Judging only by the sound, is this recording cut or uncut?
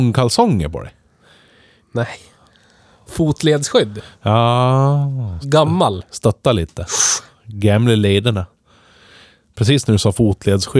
cut